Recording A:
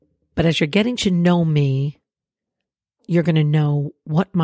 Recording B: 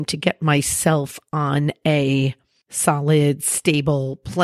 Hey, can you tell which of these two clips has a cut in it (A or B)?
B